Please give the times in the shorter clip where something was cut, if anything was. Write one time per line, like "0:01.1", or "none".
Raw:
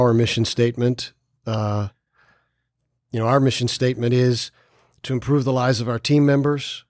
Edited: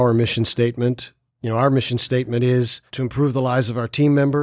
0:01.3
0:02.9